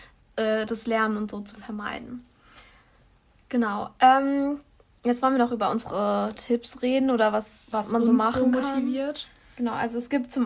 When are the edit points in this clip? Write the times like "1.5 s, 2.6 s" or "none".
none